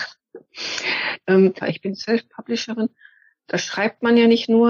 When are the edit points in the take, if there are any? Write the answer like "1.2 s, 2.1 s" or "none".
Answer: 1.6 s